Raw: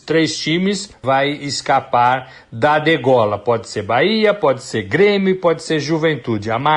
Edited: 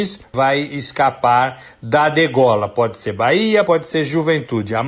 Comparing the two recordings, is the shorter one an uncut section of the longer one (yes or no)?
no